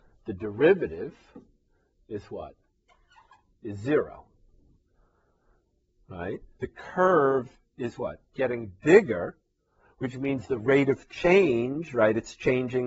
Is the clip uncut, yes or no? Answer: no